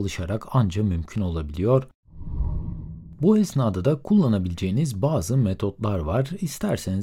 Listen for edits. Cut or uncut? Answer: uncut